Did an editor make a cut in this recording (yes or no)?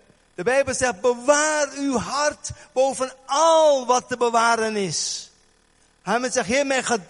no